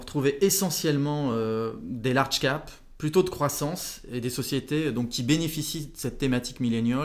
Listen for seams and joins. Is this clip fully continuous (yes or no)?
yes